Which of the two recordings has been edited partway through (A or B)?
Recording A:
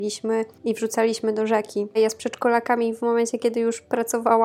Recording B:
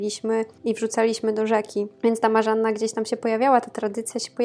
A